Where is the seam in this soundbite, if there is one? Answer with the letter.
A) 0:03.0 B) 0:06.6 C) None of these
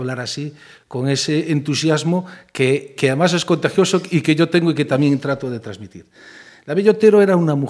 A